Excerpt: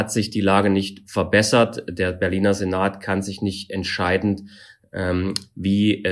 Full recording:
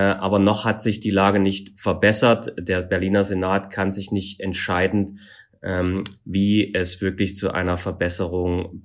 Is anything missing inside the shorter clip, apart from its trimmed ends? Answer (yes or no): no